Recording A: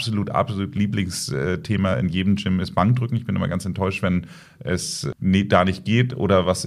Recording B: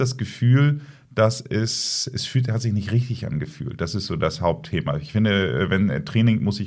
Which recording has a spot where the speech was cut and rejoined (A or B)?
A